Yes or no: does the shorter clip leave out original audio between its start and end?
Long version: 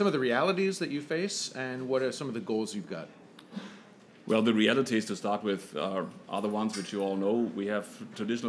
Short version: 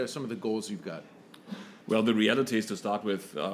yes